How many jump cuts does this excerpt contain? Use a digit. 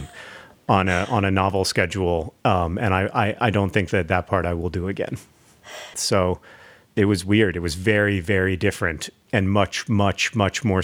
1